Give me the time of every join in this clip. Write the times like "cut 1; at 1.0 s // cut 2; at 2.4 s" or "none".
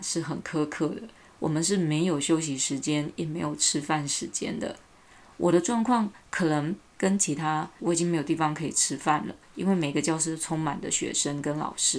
cut 1; at 7.8 s